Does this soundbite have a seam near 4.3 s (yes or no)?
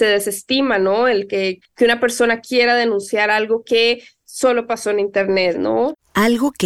no